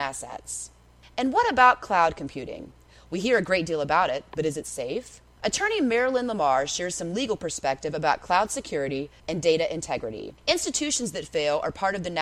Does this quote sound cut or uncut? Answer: cut